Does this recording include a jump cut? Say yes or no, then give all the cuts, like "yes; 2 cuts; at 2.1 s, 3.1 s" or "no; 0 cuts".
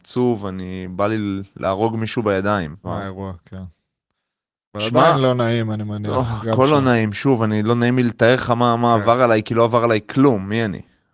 yes; 1 cut; at 2.8 s